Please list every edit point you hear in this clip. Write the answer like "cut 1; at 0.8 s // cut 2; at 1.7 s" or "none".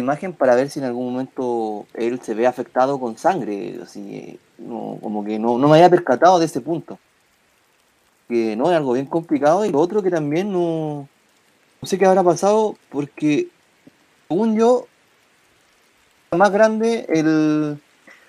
none